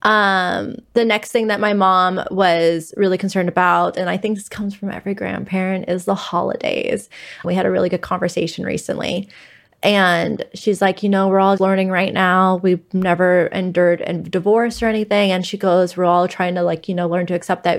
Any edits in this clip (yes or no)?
yes